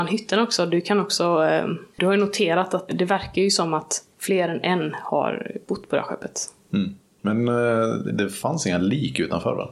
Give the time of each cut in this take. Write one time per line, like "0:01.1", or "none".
0:02.9
0:08.1